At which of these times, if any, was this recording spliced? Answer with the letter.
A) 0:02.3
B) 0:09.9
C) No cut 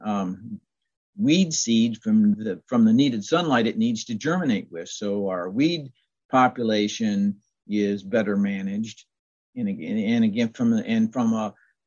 A